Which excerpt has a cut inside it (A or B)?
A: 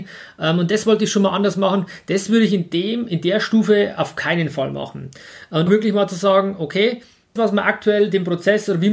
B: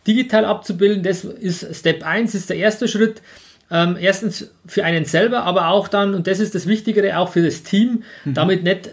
A